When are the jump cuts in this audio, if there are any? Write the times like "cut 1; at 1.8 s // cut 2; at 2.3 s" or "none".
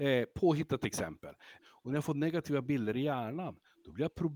cut 1; at 1.6 s